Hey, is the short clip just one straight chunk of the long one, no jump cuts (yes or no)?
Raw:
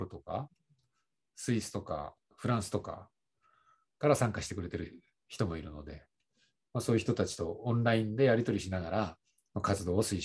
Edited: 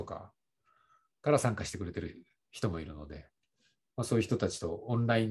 yes